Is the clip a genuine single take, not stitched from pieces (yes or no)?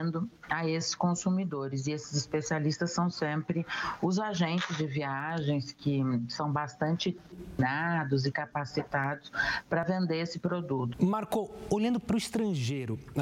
no